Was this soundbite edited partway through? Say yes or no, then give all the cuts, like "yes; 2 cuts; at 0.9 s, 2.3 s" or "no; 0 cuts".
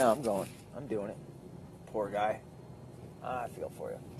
no; 0 cuts